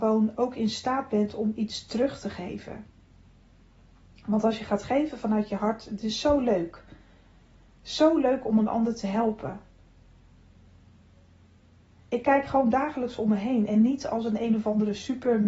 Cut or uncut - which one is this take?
uncut